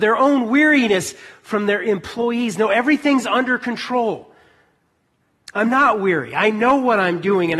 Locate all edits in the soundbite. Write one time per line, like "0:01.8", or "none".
none